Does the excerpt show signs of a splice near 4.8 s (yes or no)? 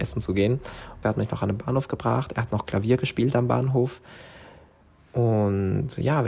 no